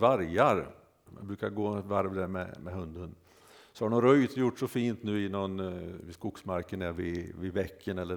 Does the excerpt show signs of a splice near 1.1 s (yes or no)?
yes